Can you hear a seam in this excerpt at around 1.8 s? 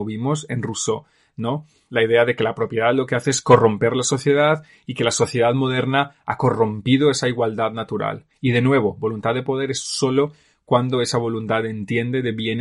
no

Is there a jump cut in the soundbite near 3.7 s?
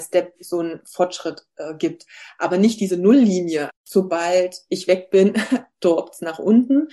yes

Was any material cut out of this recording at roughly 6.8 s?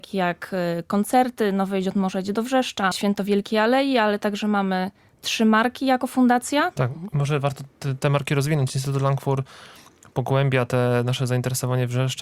yes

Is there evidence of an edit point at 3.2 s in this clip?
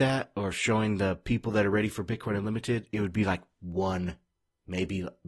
no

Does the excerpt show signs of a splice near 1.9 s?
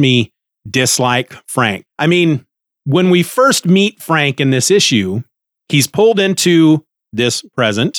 yes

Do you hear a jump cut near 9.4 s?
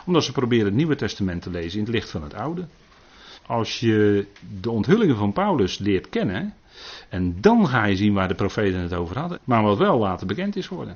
yes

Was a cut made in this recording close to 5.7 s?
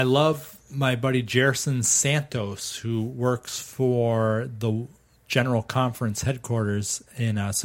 no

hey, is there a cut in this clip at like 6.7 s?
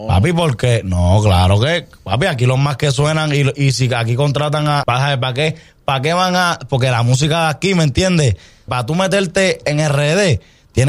no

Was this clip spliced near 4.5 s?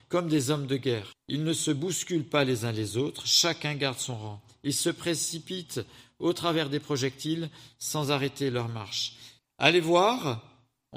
no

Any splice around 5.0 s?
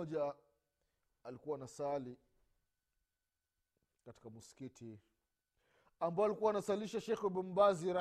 no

